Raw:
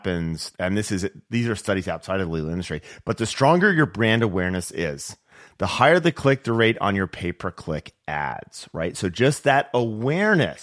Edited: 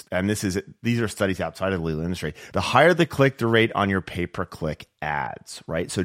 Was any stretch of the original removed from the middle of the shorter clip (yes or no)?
yes